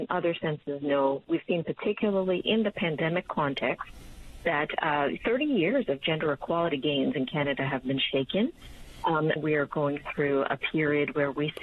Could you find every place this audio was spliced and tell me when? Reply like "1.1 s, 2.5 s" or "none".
9.4 s

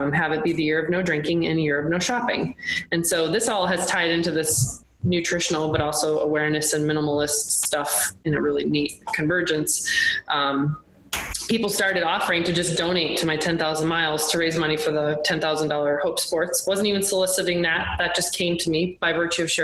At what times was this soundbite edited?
none

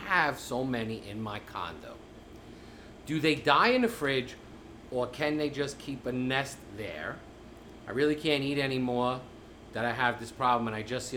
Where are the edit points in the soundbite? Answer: none

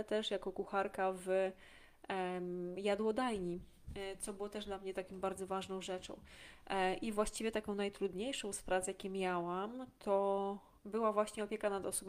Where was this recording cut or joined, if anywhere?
10.8 s

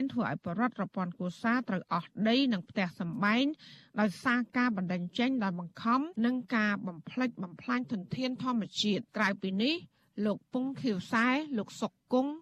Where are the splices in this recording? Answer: 6.2 s, 9.1 s

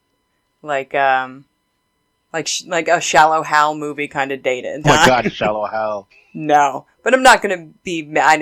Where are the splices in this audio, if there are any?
4.8 s, 6.1 s

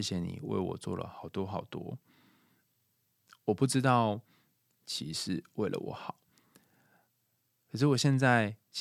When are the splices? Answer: 4.7 s

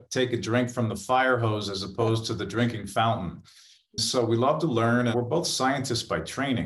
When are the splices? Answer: 5.1 s

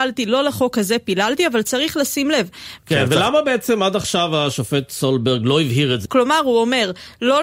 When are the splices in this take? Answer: 2.8 s, 6.1 s

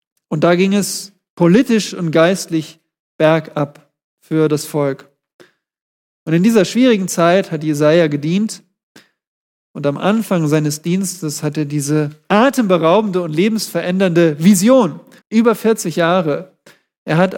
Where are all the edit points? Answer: 15.2 s

